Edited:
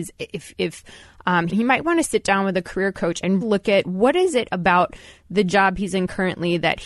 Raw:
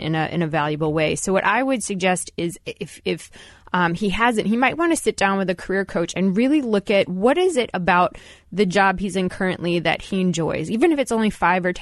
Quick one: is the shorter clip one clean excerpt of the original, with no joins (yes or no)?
no